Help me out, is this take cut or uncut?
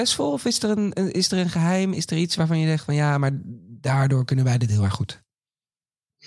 uncut